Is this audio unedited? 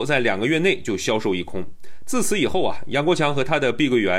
yes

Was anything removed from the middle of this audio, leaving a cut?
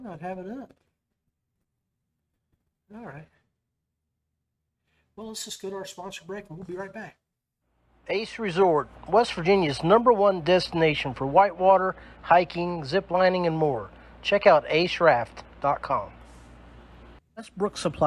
no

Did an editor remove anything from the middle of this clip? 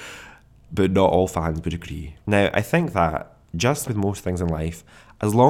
yes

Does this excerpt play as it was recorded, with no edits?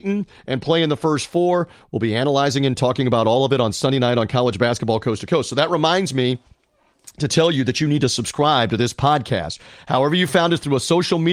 yes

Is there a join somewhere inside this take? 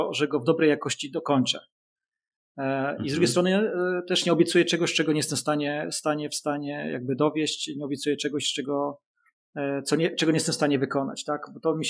no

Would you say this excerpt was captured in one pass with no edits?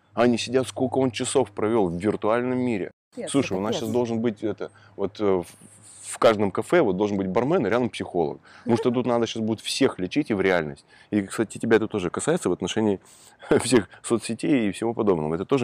yes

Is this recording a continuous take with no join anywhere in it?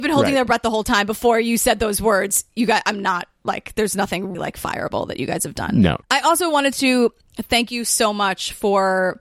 no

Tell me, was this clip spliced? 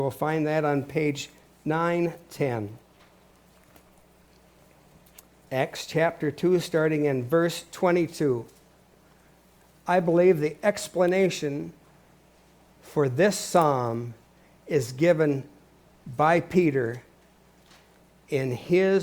no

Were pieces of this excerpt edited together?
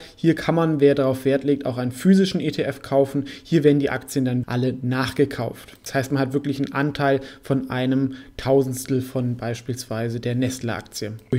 yes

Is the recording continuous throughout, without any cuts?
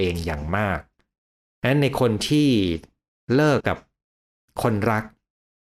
no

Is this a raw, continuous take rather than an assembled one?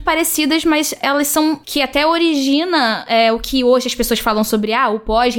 no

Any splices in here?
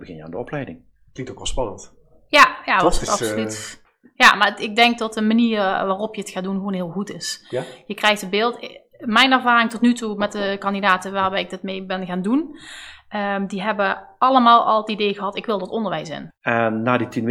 yes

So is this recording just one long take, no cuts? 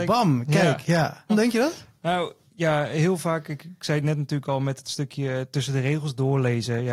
no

